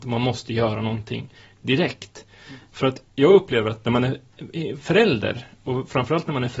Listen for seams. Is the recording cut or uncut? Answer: cut